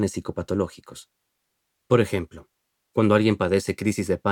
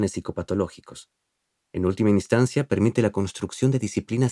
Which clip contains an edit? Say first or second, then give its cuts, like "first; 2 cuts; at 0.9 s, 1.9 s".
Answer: second; 1 cut; at 1.7 s